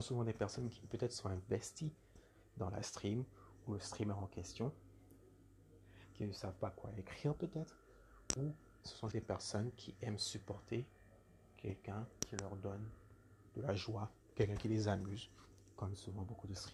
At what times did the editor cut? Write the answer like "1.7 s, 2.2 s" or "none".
9.1 s